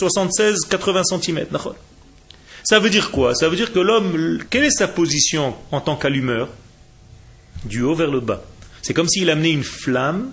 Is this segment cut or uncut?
cut